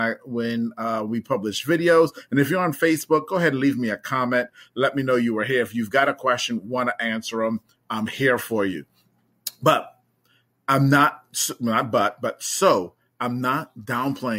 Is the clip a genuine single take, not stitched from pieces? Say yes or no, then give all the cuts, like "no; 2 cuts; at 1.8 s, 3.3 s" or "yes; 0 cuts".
yes; 0 cuts